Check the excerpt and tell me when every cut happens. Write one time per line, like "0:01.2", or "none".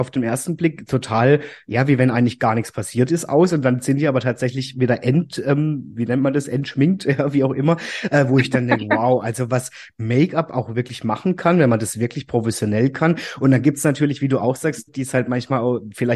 0:14.9